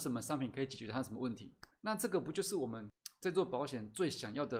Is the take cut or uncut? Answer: uncut